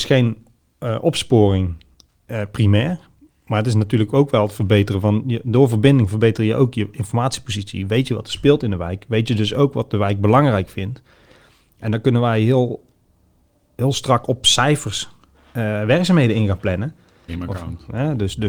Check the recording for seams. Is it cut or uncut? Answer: cut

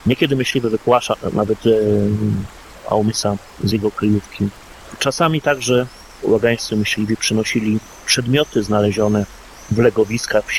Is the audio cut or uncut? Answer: uncut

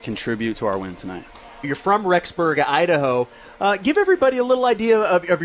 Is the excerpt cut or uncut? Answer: cut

